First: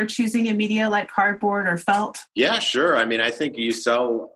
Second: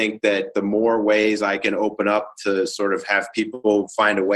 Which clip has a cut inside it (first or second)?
first